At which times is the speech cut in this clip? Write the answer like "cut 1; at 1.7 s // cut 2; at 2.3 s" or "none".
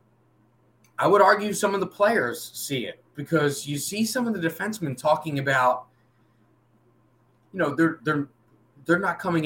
none